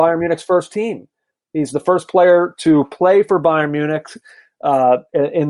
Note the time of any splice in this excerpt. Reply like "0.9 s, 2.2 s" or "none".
none